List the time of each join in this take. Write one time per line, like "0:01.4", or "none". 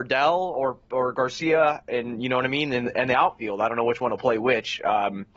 none